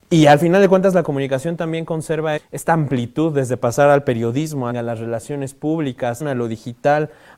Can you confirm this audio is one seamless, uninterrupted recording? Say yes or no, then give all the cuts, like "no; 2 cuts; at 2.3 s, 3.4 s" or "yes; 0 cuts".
no; 3 cuts; at 2.4 s, 4.7 s, 6.2 s